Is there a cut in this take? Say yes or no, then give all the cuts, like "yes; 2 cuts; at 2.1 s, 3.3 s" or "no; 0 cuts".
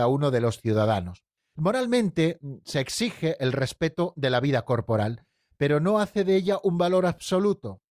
no; 0 cuts